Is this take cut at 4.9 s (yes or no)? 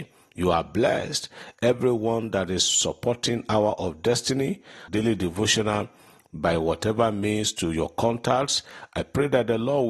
yes